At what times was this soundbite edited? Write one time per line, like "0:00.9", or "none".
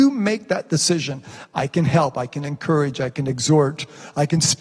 none